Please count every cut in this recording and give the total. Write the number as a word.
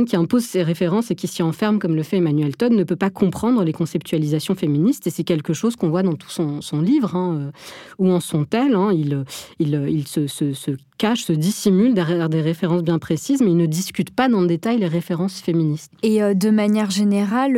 one